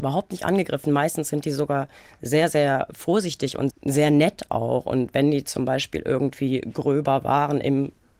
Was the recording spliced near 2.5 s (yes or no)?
no